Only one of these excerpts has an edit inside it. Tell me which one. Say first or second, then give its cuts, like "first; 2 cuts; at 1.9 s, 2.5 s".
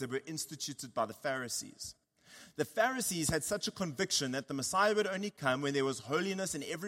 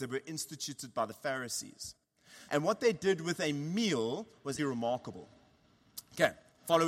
second; 2 cuts; at 2.5 s, 4.6 s